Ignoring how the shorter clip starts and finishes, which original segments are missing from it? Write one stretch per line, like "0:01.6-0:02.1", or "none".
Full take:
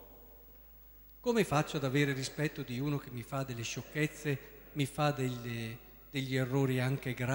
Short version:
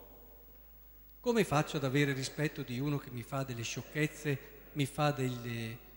none

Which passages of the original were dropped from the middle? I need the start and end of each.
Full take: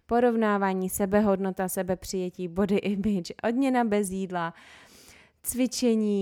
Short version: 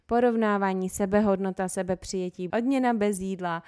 0:02.5-0:03.4

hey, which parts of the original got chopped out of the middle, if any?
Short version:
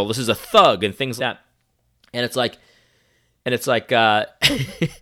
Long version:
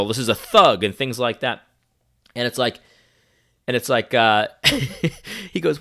0:01.2-0:01.4

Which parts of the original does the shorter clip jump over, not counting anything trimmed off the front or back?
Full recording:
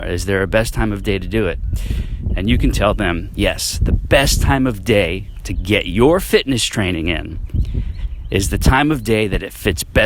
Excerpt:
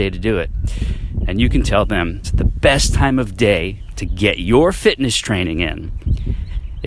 0:03.3-0:03.7

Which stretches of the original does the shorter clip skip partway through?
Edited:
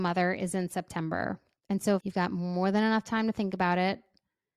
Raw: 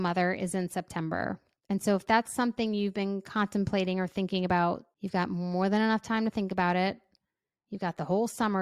0:02.0-0:05.0

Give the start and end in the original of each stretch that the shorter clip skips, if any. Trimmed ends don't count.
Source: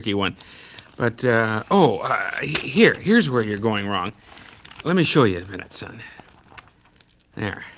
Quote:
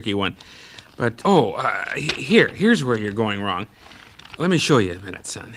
0:01.2-0:01.6

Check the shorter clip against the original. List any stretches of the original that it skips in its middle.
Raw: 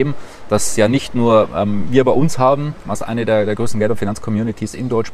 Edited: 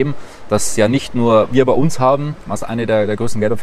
0:01.5-0:01.9

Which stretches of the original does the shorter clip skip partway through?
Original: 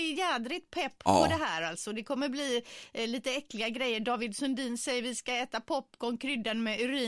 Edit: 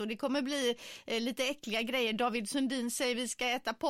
none

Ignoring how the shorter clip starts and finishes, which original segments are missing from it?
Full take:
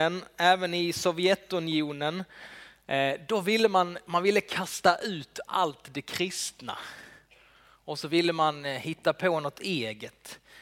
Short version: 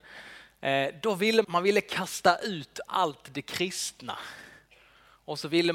0:03.7-0:04.0

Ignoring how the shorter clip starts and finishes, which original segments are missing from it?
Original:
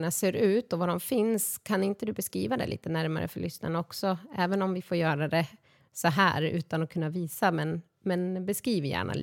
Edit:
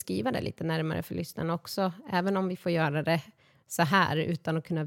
none

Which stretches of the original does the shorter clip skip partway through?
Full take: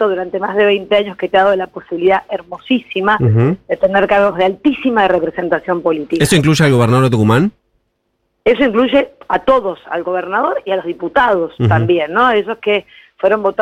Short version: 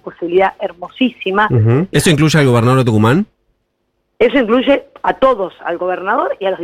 0:03.6-0:06.2

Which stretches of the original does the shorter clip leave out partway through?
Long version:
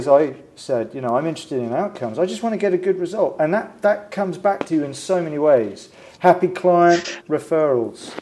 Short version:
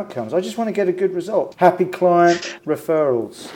0:03.4-0:06.1

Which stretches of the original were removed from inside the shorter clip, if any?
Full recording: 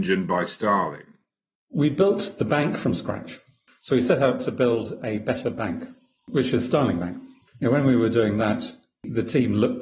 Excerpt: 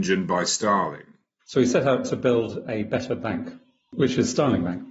0:01.4-0:03.7

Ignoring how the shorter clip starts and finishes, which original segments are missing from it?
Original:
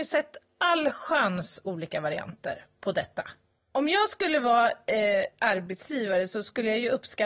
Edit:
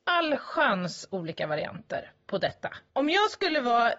0:03.4-0:03.7

